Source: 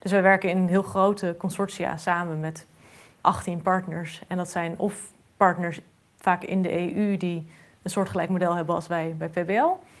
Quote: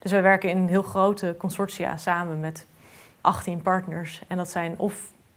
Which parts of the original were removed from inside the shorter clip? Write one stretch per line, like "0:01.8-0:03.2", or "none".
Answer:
none